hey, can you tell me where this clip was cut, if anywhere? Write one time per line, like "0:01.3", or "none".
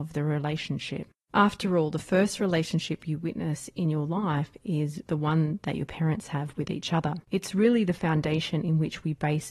0:01.2
0:07.2